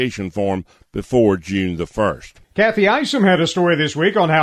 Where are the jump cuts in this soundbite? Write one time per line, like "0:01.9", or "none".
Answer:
0:02.4